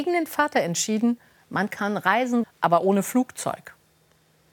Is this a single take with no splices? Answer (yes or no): no